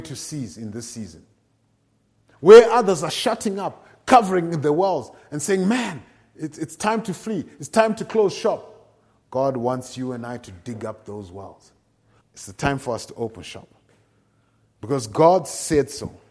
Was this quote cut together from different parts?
yes; 1 cut; at 12.2 s

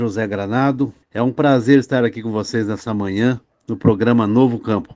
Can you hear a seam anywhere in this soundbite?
yes; 1 cut; at 1.0 s

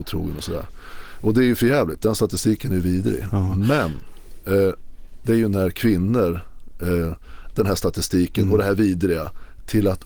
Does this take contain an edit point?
yes; 2 cuts; at 5.2 s, 7.5 s

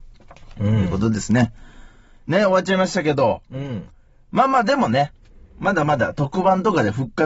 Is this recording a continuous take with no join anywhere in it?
yes; 0 cuts

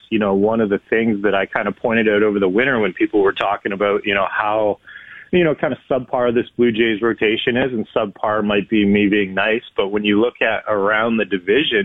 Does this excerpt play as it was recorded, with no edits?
yes; 0 cuts

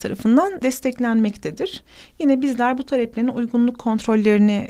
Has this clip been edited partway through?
no; 0 cuts

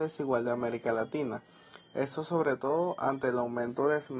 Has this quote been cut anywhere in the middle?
yes; 1 cut; at 1.9 s

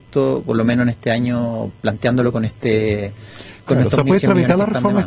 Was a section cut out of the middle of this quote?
no; 0 cuts

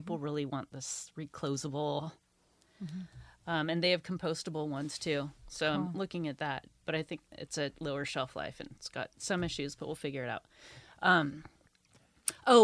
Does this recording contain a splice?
no; 0 cuts

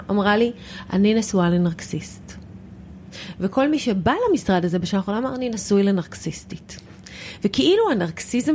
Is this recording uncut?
yes; 0 cuts

